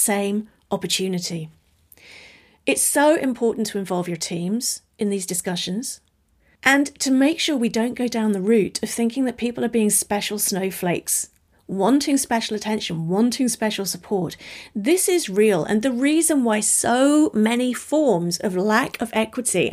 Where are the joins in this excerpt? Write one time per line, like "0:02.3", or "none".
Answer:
none